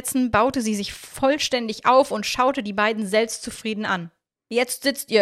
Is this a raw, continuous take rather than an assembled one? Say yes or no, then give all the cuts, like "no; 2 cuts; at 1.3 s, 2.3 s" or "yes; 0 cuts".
yes; 0 cuts